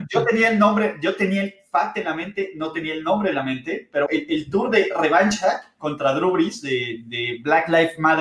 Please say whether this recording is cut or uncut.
cut